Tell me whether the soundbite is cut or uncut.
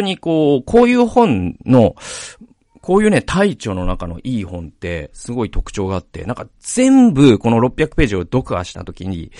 uncut